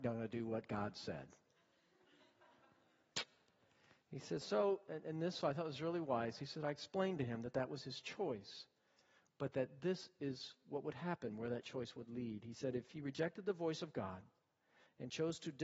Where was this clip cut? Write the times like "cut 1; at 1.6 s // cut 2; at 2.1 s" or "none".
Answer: none